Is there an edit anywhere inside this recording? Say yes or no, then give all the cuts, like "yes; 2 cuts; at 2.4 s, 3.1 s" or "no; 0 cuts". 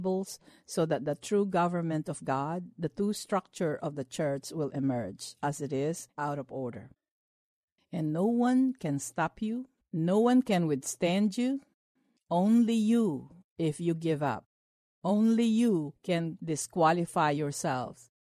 yes; 1 cut; at 7.8 s